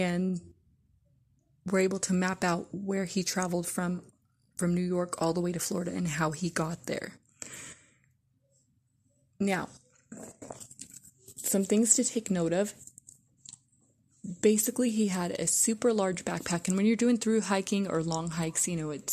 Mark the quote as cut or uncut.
uncut